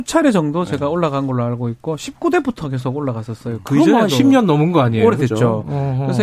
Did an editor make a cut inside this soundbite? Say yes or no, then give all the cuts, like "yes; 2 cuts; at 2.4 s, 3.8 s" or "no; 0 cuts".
no; 0 cuts